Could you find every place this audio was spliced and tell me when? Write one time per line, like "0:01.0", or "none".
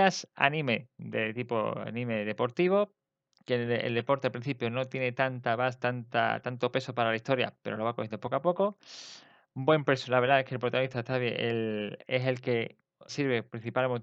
0:12.0
0:13.1